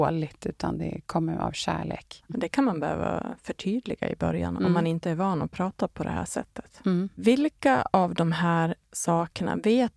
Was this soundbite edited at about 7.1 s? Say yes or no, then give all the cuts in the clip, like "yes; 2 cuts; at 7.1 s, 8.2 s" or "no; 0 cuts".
no; 0 cuts